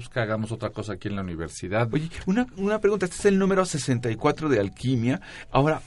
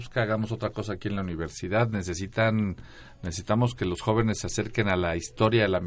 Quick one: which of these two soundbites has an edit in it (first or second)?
first